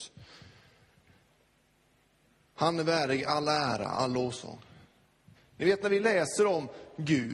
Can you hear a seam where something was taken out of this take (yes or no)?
yes